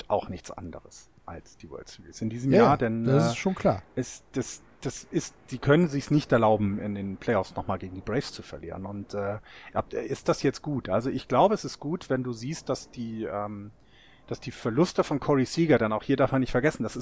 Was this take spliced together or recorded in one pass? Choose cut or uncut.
uncut